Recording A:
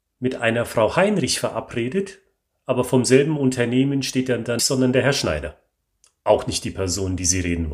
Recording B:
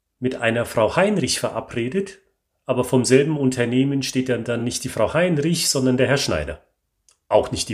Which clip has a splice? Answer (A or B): A